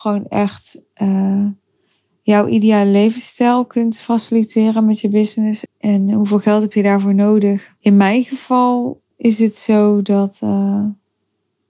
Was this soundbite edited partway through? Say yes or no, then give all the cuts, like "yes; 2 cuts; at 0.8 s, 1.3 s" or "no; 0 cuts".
yes; 3 cuts; at 5.7 s, 7.8 s, 9.1 s